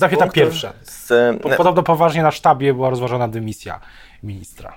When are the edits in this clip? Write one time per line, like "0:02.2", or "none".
none

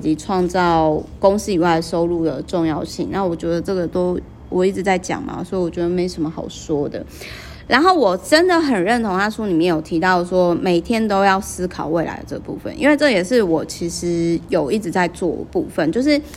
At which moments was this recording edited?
0:07.7

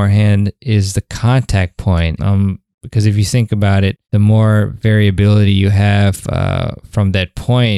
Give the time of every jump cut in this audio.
0:02.2
0:04.0

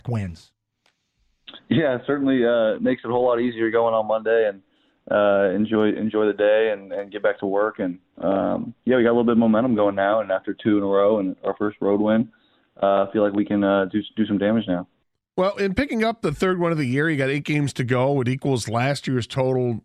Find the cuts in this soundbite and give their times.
none

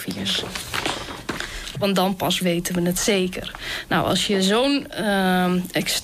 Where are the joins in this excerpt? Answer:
0:01.7

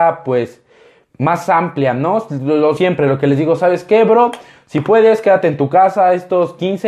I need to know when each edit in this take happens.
none

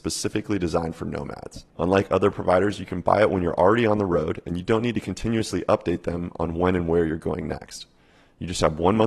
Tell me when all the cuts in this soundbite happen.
0:01.7

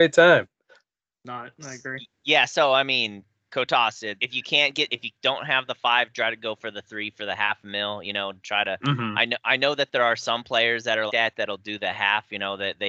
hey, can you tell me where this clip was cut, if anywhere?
0:02.1
0:04.2
0:11.1

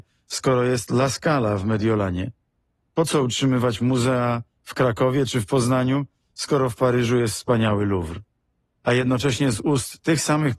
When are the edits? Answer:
none

